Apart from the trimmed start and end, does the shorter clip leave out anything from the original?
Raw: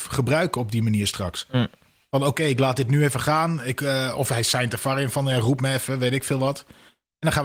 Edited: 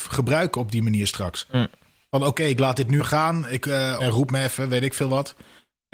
yes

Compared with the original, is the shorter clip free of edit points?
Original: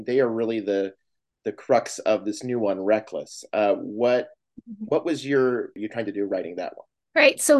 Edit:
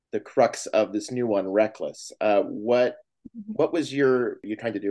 yes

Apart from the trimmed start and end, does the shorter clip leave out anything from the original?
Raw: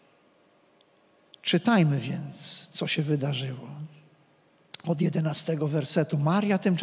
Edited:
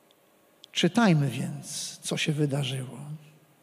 no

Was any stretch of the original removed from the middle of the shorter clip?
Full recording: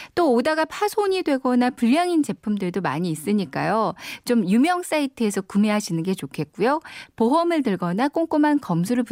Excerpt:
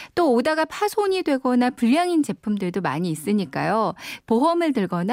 yes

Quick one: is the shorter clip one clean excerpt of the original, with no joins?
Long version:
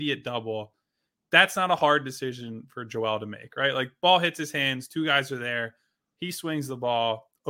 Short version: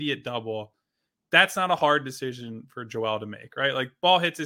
yes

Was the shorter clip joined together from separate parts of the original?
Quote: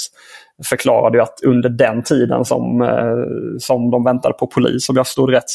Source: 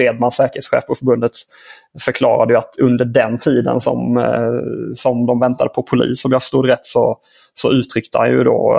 no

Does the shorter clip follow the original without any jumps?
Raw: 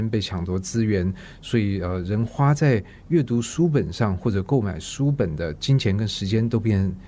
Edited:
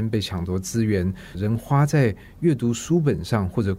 no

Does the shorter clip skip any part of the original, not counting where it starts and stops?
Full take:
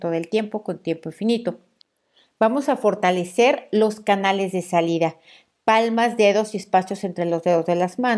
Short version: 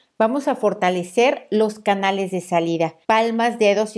yes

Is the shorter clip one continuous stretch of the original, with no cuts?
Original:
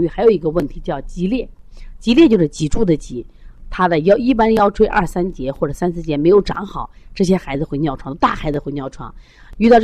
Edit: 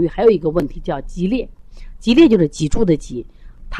yes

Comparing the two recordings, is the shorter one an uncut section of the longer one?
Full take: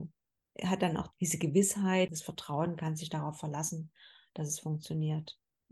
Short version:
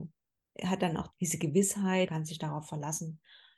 no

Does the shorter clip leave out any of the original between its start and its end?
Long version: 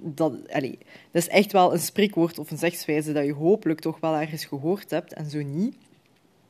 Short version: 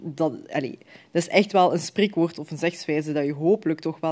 no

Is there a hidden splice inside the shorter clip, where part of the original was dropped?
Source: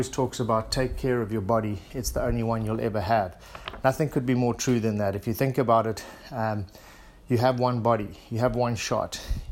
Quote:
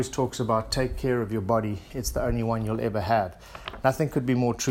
no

